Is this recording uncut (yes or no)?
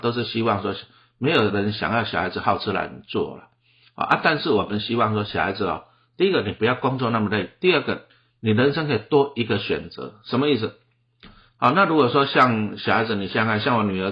yes